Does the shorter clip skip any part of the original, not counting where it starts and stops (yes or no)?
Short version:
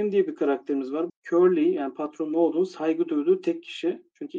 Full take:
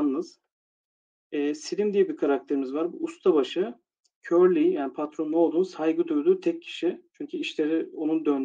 yes